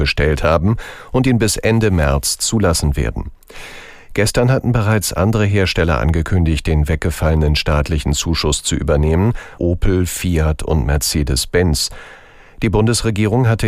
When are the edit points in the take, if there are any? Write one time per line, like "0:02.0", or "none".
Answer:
0:09.6